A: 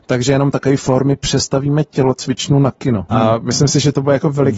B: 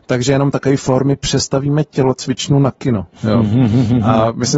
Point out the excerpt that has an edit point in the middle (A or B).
A